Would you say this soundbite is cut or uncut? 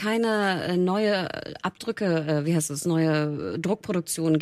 uncut